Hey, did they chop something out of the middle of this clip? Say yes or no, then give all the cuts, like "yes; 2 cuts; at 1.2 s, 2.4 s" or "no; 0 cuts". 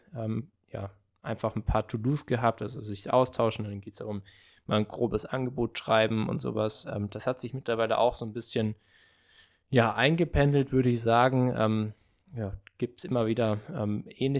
no; 0 cuts